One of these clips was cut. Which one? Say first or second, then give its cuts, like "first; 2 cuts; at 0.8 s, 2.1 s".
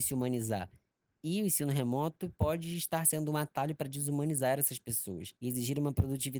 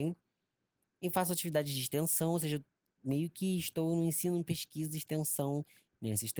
first; 1 cut; at 5.4 s